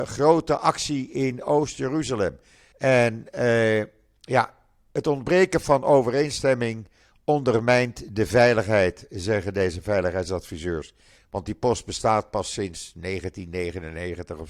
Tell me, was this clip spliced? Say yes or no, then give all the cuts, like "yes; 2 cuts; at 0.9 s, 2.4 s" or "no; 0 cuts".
yes; 2 cuts; at 2.7 s, 11.2 s